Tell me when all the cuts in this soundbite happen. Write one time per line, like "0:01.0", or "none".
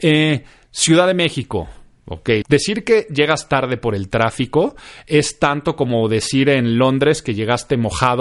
0:02.4